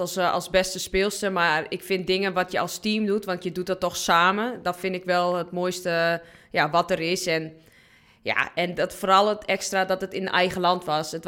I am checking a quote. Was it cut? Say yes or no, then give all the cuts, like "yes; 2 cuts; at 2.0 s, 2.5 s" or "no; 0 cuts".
no; 0 cuts